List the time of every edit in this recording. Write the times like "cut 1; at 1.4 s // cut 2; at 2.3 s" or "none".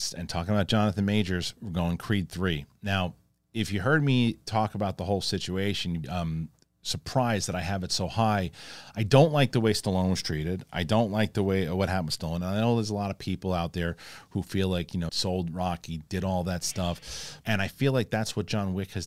cut 1; at 6.0 s // cut 2; at 15.1 s // cut 3; at 17.4 s